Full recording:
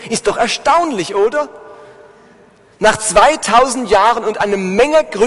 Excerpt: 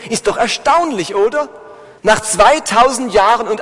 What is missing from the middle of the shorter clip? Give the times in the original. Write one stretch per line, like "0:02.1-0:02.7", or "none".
0:02.0-0:02.7